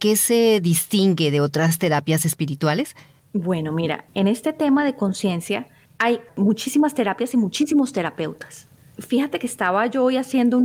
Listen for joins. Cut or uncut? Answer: uncut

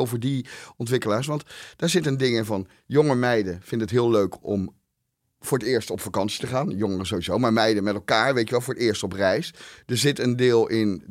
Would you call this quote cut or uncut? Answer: uncut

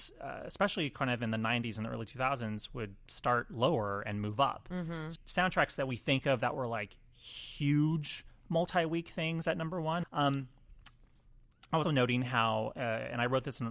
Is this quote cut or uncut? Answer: cut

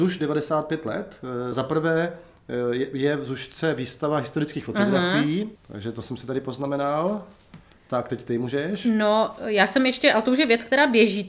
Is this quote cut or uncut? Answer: cut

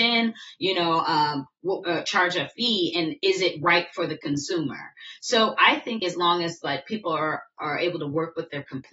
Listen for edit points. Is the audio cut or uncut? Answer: cut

